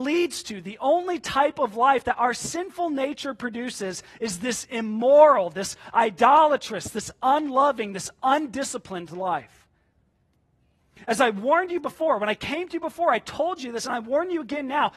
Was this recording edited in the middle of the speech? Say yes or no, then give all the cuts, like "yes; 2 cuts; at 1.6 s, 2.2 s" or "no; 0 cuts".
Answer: yes; 1 cut; at 11.1 s